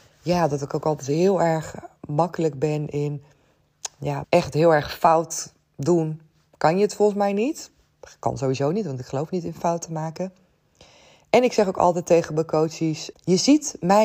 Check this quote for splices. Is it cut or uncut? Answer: cut